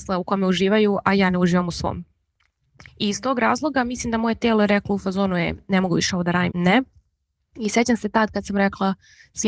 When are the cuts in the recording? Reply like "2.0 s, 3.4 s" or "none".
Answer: 2.9 s, 6.5 s